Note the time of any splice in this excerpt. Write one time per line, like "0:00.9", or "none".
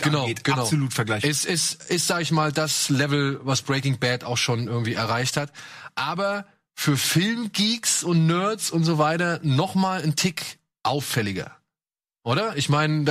none